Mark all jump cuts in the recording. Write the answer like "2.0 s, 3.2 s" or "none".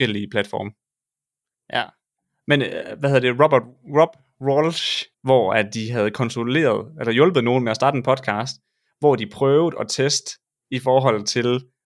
1.5 s, 5.1 s